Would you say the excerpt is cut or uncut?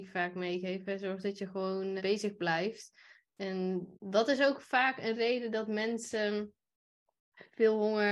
cut